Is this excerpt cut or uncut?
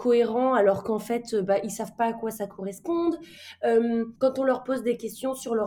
cut